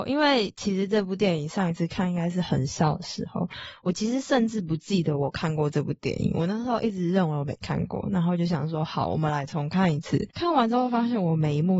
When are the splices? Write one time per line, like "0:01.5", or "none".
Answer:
none